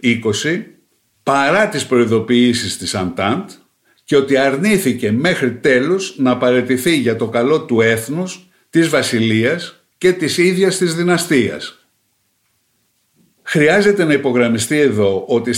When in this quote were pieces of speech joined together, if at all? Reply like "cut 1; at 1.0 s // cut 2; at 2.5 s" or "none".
cut 1; at 9.9 s